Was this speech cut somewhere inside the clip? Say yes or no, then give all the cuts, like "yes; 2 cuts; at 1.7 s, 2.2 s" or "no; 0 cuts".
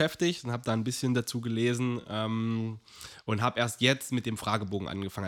no; 0 cuts